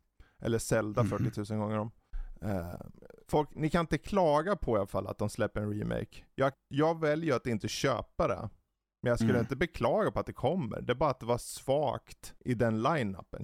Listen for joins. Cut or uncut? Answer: cut